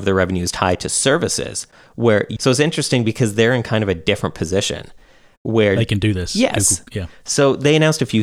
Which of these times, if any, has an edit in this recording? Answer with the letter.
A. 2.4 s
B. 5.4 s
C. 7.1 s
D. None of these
A